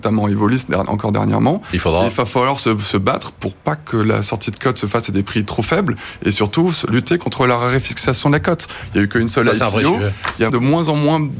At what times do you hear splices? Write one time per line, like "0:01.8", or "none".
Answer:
0:10.5

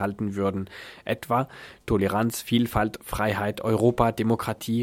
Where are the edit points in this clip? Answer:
none

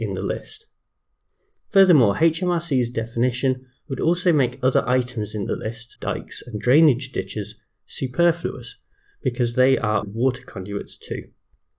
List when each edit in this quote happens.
0:06.0
0:10.0

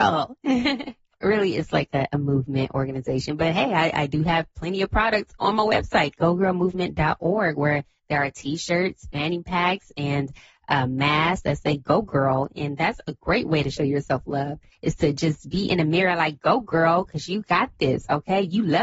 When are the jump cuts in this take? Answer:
none

